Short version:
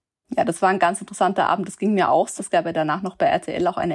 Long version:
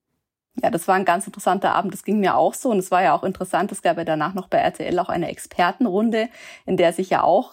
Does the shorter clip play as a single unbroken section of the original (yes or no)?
no